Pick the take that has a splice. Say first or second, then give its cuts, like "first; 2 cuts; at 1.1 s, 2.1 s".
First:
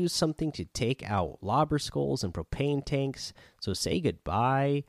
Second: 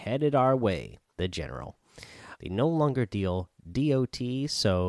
second; 2 cuts; at 1.1 s, 2.4 s